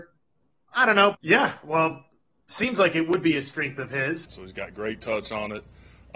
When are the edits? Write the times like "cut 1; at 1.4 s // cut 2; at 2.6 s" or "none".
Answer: cut 1; at 1.1 s // cut 2; at 4.3 s